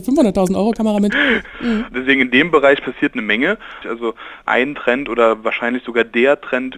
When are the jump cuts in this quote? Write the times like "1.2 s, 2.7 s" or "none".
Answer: 1.5 s, 3.8 s